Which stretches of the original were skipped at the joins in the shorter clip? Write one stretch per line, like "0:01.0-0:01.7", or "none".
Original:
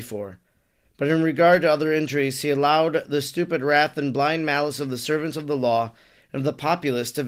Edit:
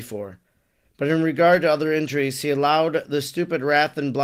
none